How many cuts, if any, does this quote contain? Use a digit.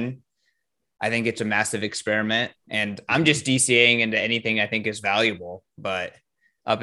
2